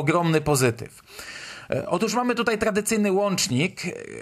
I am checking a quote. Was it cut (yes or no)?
no